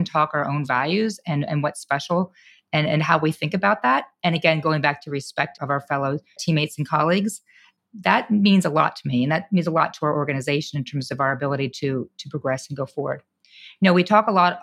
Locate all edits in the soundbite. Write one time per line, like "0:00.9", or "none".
none